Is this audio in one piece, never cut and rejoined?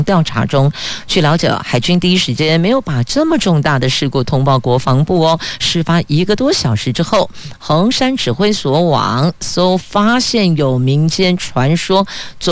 yes; 0 cuts

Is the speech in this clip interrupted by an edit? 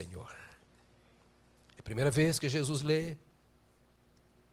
no; 0 cuts

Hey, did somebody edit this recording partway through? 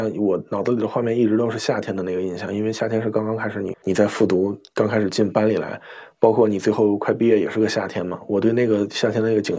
yes; 1 cut; at 3.7 s

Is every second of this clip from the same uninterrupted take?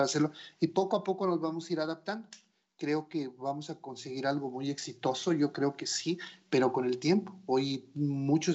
yes; 0 cuts

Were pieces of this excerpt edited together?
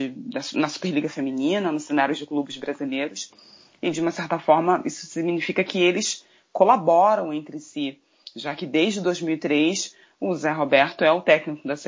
no; 0 cuts

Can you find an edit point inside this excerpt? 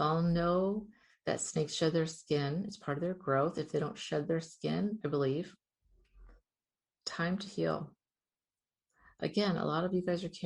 yes; 1 cut; at 5.0 s

